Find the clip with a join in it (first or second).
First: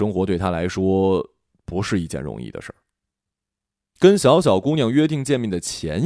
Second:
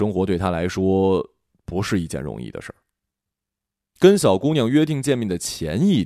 second